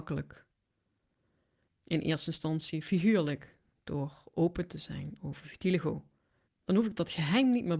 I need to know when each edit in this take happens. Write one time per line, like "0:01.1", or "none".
0:01.7
0:06.4